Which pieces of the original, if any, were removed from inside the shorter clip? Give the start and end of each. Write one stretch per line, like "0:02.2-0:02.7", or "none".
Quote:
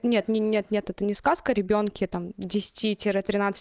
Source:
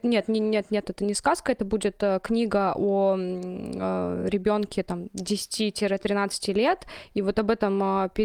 0:01.5-0:04.3